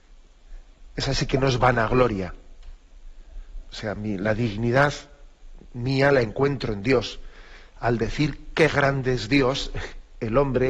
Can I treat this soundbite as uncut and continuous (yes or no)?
no